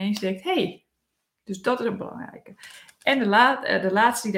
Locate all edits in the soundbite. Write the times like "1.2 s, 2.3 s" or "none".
none